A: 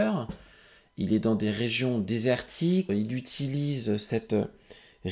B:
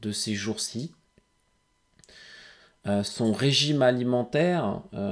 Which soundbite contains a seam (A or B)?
A